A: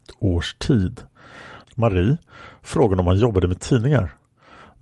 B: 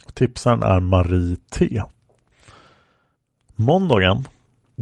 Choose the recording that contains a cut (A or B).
A